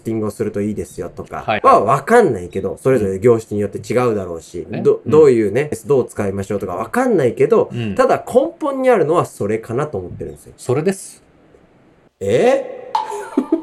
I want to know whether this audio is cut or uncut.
uncut